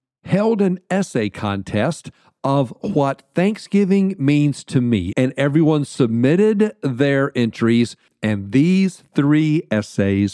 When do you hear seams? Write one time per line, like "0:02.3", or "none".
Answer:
0:05.1